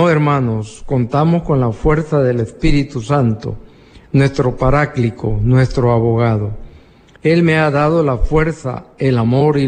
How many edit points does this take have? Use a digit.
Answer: 1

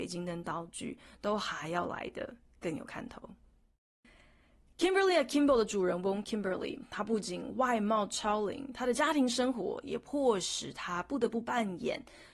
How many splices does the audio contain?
0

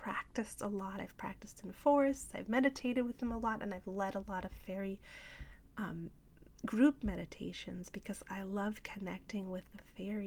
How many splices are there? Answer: 0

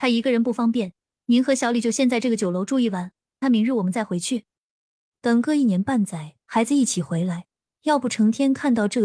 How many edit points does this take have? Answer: 3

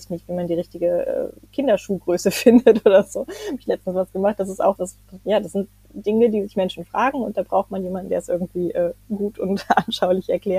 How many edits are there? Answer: 1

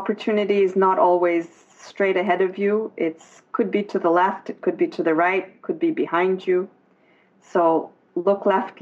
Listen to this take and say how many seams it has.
0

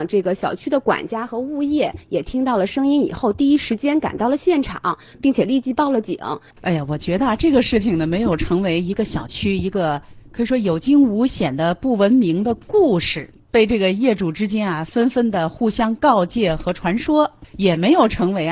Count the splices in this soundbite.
0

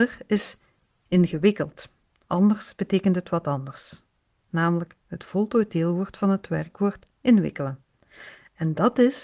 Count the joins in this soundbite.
1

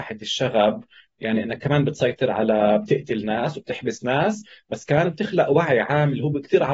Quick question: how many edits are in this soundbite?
0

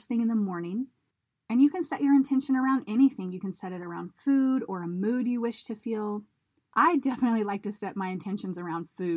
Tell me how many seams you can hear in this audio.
0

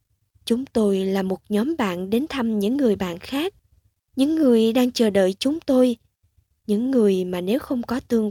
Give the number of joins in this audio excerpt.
0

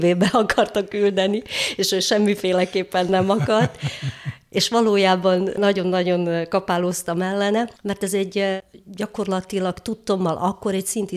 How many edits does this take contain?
0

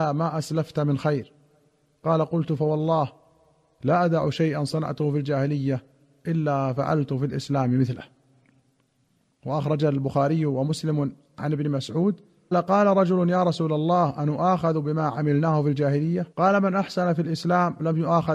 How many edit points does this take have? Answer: 2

